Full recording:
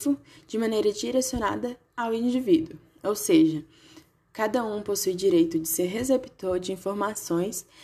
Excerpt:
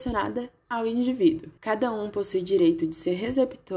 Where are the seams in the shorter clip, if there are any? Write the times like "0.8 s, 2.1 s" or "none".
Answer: 1.6 s